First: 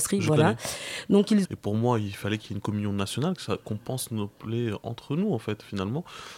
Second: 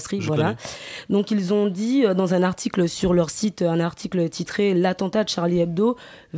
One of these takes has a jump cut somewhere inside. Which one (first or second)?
first